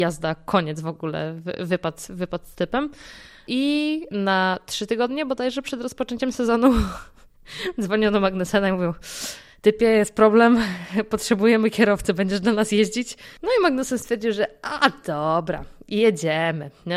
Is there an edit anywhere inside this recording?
no; 0 cuts

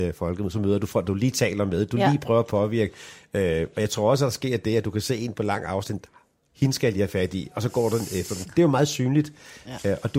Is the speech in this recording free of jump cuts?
yes; 0 cuts

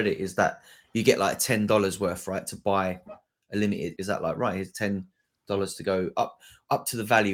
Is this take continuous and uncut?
no; 1 cut; at 4.0 s

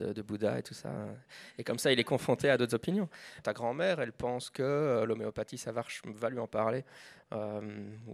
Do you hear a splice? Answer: yes; 1 cut; at 3.4 s

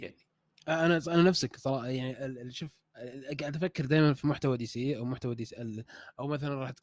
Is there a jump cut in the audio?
yes; 1 cut; at 1.0 s

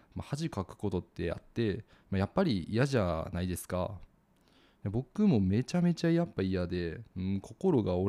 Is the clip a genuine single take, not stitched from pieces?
yes; 0 cuts

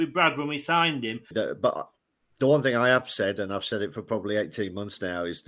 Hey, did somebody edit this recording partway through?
yes; 1 cut; at 1.3 s

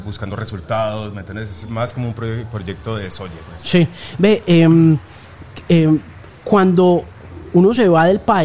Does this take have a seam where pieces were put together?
no; 0 cuts

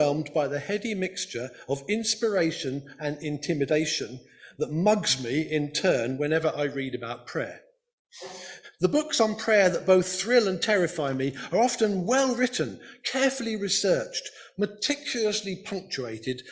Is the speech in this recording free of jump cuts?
yes; 0 cuts

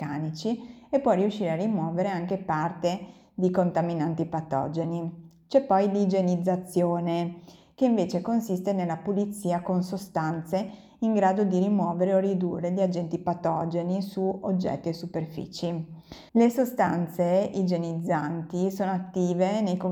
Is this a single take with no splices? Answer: no; 1 cut; at 16.3 s

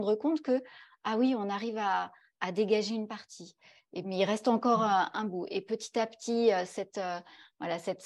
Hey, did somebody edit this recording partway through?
no; 0 cuts

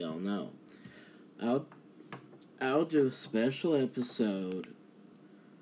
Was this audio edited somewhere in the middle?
no; 0 cuts

